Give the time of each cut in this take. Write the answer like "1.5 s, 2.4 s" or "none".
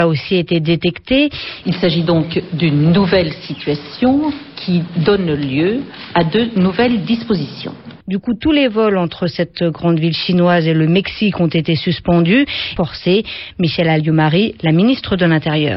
1.6 s, 8.0 s, 12.8 s

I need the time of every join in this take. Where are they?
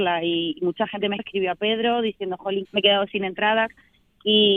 1.2 s, 2.6 s

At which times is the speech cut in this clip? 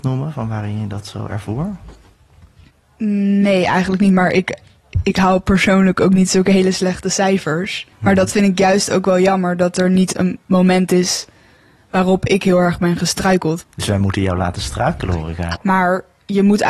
7.9 s, 13.6 s, 15.6 s

